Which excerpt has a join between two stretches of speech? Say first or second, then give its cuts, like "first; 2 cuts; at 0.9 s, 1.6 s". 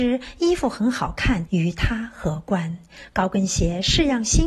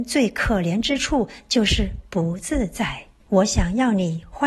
second; 1 cut; at 3.2 s